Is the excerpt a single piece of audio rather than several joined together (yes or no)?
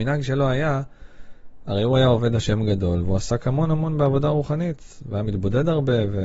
yes